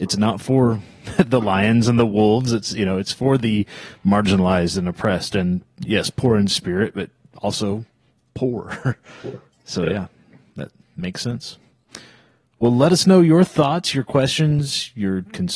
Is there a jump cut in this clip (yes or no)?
no